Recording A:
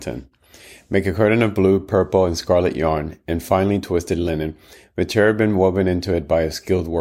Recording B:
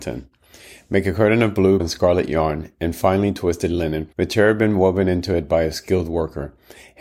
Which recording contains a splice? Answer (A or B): B